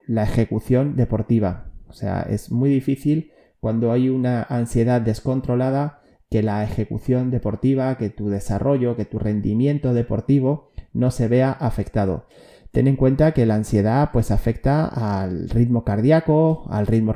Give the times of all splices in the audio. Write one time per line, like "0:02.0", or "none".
none